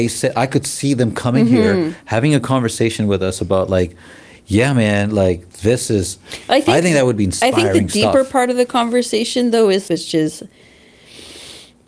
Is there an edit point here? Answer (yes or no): yes